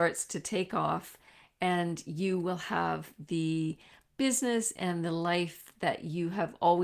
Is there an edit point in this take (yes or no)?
no